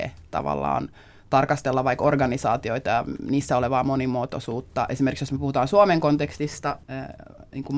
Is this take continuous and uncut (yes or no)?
no